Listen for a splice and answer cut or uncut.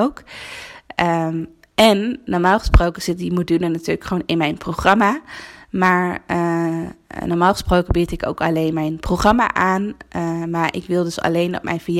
uncut